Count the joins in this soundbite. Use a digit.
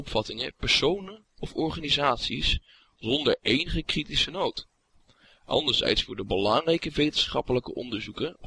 0